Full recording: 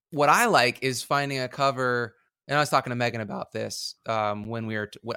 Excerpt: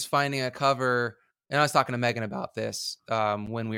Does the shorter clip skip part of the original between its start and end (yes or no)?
no